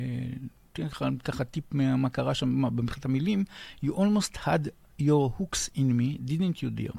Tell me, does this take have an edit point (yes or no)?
no